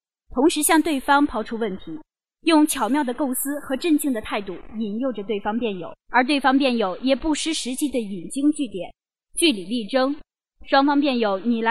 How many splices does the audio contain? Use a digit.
1